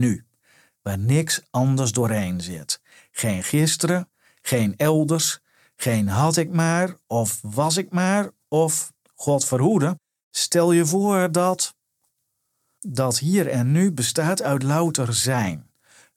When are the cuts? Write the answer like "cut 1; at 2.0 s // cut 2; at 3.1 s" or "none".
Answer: cut 1; at 8.4 s